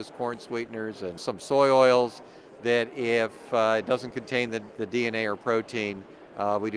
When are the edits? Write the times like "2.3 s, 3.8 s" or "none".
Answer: none